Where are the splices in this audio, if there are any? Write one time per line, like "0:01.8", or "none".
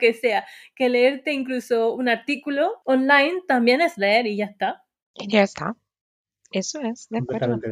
none